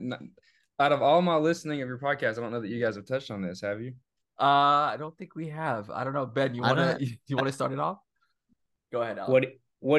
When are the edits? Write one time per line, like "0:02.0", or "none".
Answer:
none